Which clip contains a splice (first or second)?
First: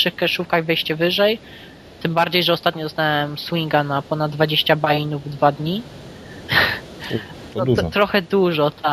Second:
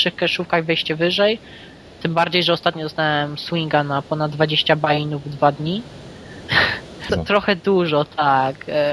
second